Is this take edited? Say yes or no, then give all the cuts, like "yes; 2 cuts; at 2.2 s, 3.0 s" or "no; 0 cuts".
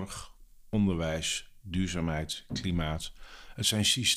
no; 0 cuts